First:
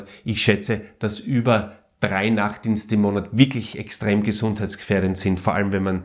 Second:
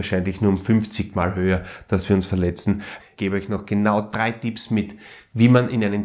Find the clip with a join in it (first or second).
second